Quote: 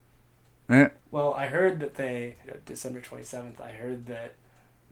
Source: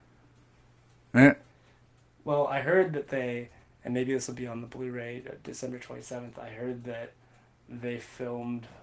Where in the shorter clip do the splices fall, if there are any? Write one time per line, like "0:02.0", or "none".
0:01.0
0:02.4